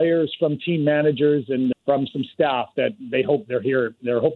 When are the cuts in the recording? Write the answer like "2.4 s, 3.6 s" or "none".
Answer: 1.7 s